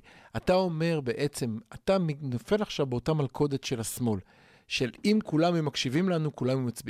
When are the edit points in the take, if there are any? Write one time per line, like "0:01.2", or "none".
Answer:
none